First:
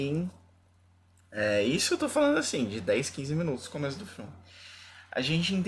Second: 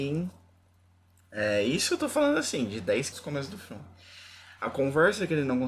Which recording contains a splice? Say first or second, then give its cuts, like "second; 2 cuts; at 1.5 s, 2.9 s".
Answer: second; 2 cuts; at 3.1 s, 4.6 s